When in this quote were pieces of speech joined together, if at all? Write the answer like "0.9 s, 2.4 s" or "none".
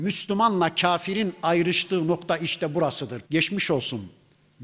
3.2 s